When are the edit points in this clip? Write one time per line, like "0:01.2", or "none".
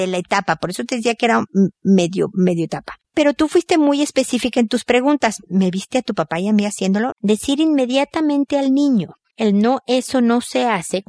0:07.1